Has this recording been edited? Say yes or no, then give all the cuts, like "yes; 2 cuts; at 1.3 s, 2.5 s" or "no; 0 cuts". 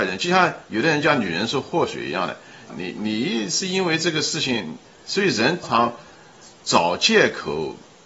yes; 2 cuts; at 2.7 s, 5.6 s